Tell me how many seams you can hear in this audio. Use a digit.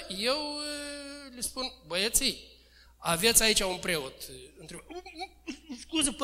0